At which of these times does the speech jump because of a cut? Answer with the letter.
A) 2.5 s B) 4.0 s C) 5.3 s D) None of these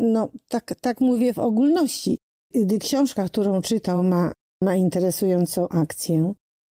D